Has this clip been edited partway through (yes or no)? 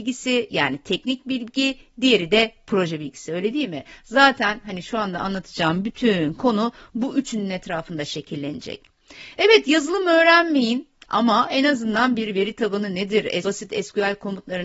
yes